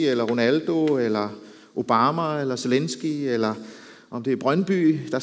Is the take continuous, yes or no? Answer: yes